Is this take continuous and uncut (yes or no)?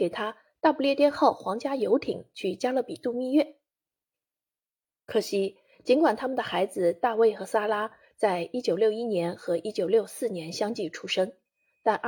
yes